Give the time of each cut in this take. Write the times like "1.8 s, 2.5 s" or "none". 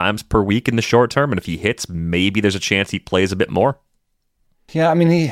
none